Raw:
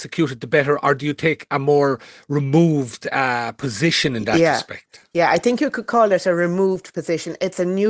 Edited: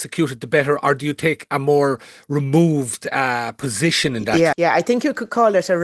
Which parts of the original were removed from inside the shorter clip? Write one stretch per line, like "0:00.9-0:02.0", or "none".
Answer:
0:04.5-0:05.1